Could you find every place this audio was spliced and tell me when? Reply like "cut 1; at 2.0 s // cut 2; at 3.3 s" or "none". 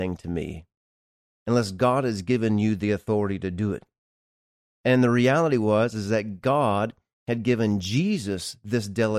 none